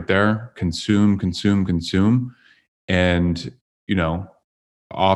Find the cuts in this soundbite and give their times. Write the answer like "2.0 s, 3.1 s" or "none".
none